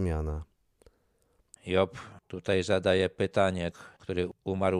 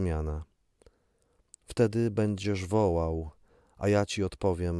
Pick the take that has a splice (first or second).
first